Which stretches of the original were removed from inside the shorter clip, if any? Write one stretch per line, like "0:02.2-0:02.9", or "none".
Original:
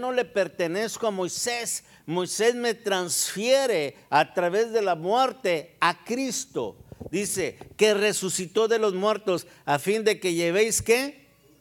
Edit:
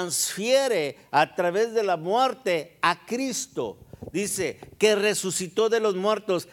none